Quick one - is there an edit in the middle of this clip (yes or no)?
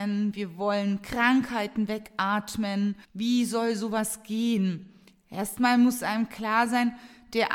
yes